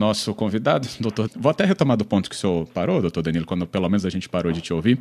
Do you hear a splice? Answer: yes; 1 cut; at 1.3 s

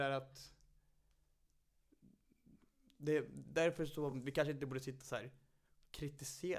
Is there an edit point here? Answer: no; 0 cuts

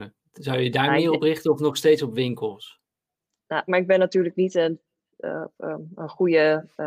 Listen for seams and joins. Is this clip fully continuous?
no; 1 cut; at 3.7 s

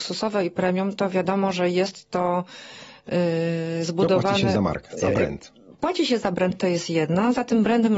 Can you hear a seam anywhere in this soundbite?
no; 0 cuts

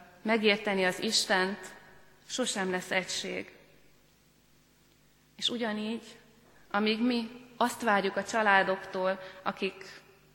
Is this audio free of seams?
yes; 0 cuts

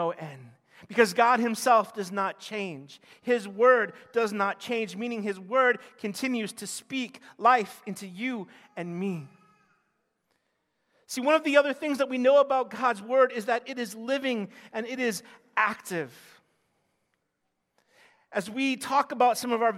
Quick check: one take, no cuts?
yes; 0 cuts

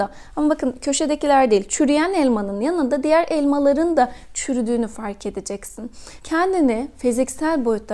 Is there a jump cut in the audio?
yes; 1 cut; at 6.2 s

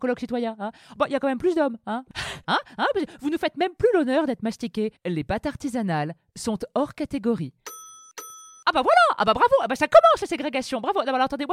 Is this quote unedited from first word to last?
no; 2 cuts; at 2.4 s, 5.0 s

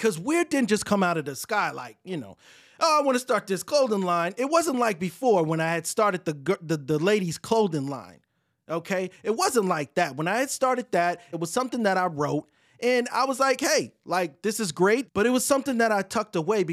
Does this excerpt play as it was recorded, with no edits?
no; 2 cuts; at 11.3 s, 15.1 s

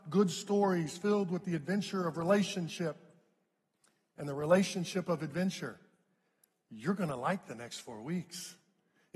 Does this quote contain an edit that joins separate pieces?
no; 0 cuts

